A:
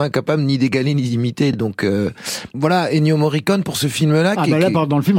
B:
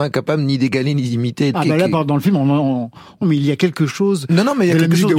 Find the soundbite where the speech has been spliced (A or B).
B